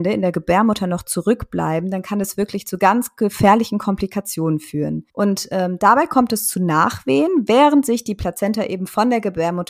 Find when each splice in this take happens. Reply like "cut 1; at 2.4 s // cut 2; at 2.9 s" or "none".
cut 1; at 5.1 s